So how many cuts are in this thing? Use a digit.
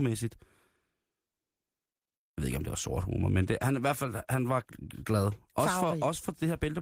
0